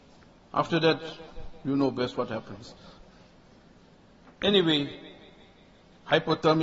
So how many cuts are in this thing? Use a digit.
0